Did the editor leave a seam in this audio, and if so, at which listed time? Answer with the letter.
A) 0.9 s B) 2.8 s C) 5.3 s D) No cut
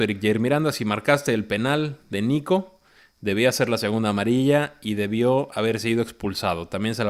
D